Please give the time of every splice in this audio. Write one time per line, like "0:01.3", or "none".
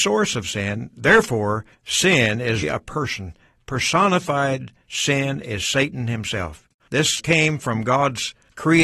0:02.6
0:06.8